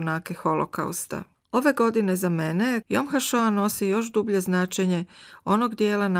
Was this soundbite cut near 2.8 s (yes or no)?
yes